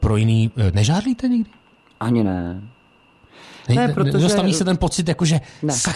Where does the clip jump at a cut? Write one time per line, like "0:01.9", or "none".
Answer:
none